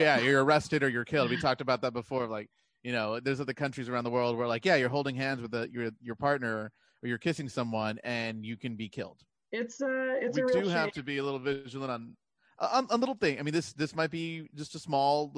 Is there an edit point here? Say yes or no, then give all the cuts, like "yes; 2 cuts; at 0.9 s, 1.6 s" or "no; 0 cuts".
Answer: no; 0 cuts